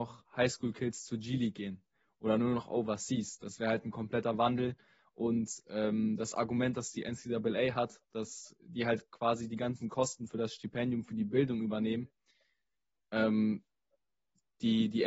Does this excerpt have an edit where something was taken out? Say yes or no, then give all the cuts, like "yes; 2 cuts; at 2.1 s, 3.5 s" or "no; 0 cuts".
no; 0 cuts